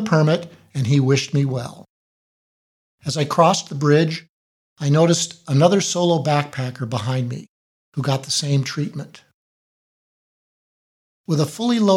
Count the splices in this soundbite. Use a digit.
0